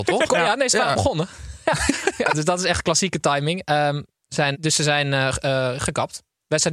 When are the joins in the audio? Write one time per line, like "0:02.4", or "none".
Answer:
0:04.5